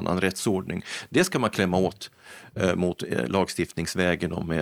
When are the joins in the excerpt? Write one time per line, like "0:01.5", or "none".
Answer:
none